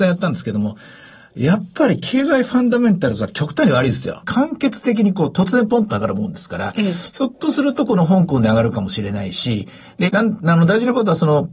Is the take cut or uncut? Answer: cut